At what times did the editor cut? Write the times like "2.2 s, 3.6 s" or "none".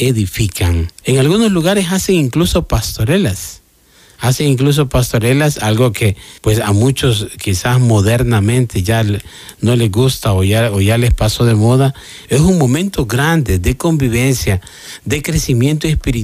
1.0 s, 6.4 s, 12.2 s